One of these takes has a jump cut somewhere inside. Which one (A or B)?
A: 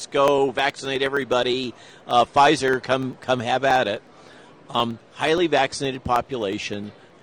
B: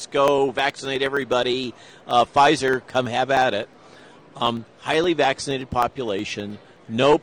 B